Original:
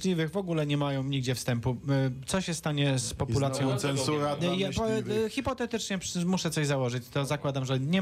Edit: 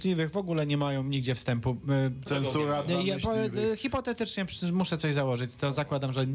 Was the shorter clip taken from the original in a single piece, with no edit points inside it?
no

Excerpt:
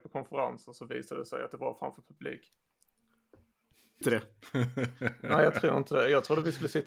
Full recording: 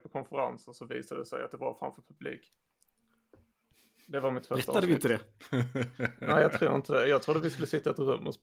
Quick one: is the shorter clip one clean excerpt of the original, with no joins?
no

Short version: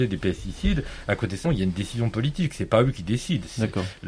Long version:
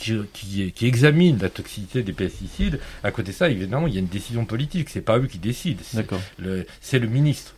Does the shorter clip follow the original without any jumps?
no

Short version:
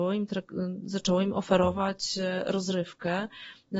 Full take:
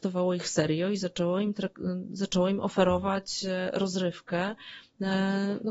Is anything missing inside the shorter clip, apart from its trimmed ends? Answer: no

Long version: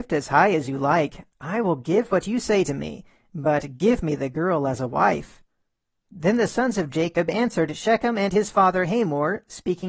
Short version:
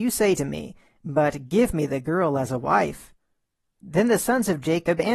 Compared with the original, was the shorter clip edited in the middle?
no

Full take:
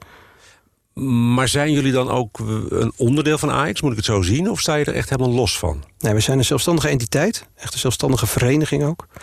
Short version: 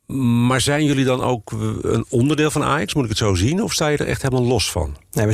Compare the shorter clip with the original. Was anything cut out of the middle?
no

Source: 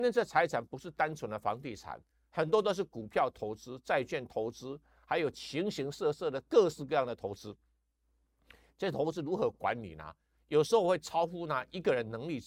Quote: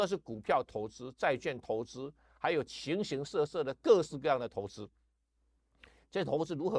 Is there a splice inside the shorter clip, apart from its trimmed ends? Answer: no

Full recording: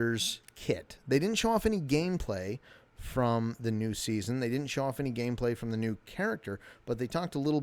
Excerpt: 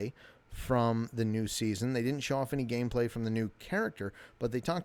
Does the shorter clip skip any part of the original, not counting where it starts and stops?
no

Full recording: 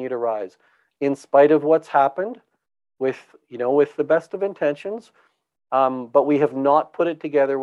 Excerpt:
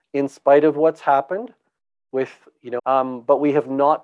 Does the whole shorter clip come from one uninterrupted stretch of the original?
no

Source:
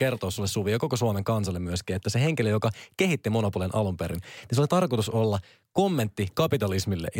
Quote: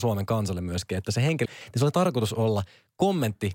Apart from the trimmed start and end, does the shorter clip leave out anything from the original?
yes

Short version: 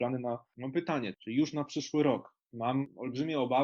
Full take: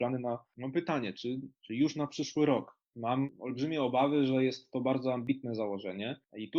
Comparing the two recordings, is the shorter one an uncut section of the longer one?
no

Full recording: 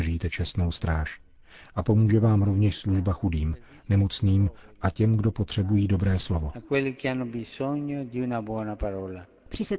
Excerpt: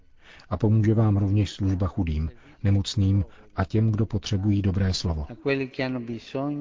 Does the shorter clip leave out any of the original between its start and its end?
no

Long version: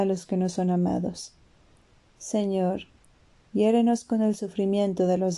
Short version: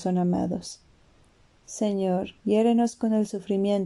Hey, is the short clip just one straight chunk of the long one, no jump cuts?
no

